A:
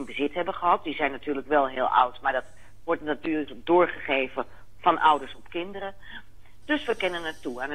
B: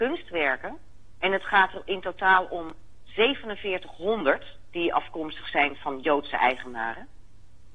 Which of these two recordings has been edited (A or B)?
A